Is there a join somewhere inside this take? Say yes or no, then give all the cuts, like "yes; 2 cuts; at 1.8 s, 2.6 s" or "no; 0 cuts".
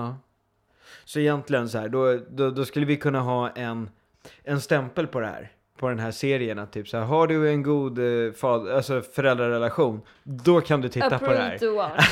no; 0 cuts